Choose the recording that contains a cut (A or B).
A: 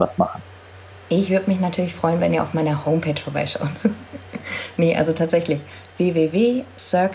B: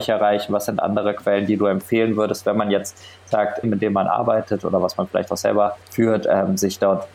B